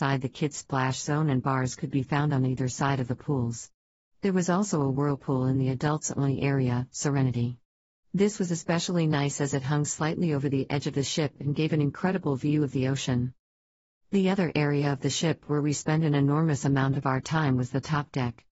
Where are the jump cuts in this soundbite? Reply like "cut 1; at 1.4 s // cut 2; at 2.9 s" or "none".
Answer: none